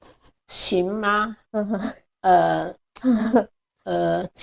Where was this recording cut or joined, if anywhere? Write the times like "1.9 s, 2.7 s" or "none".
3.0 s